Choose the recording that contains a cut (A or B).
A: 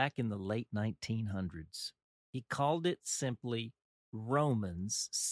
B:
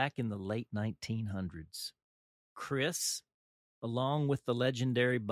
A